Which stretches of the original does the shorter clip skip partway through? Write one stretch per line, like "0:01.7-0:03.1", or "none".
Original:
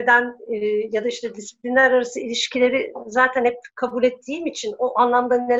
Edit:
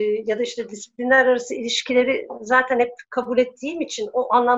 none